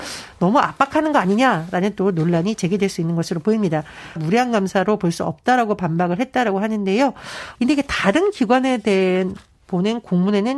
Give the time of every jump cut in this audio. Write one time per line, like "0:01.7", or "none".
0:04.2
0:07.5